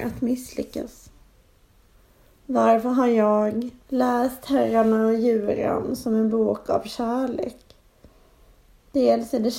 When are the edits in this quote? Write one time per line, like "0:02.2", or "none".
0:03.9